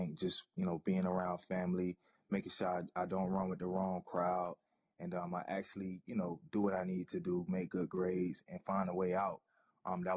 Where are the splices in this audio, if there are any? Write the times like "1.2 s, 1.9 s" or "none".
7.5 s